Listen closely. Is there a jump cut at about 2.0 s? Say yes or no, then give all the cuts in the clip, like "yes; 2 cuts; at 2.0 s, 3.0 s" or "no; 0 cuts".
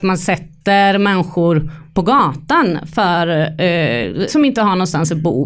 no; 1 cut; at 4.3 s